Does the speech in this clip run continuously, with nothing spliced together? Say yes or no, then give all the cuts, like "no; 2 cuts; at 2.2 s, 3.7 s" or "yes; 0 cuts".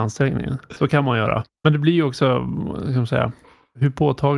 no; 1 cut; at 1.6 s